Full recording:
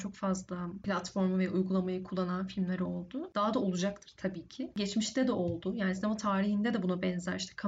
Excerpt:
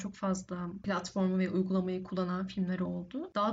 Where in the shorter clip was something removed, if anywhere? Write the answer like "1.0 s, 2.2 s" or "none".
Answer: none